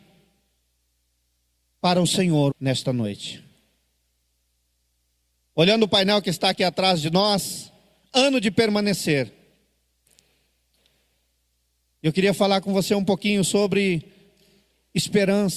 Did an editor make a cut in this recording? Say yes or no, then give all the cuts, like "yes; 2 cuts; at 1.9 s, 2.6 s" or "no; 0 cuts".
yes; 1 cut; at 2.5 s